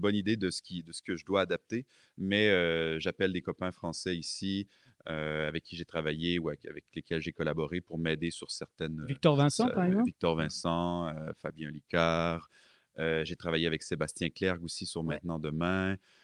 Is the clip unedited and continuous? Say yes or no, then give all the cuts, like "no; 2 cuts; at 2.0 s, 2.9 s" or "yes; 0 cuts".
yes; 0 cuts